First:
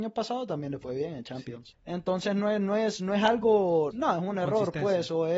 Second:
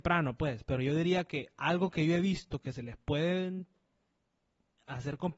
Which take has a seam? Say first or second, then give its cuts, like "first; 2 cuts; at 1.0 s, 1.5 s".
first; 2 cuts; at 1.7 s, 3.9 s